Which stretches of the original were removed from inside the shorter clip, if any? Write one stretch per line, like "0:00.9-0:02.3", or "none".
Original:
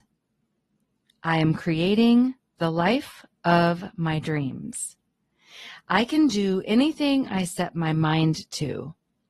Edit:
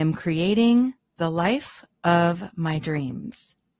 none